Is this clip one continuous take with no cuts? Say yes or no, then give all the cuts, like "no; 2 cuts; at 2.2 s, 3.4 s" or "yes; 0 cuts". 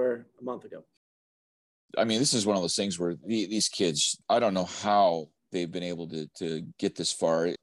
yes; 0 cuts